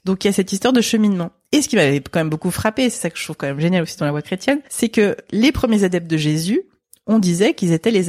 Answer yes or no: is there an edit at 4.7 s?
yes